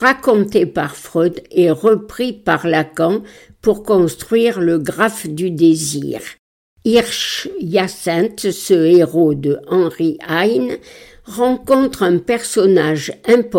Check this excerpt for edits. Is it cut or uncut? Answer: uncut